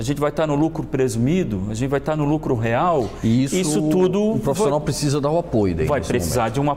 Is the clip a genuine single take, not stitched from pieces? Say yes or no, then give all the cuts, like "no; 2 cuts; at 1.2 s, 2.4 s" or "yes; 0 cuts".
yes; 0 cuts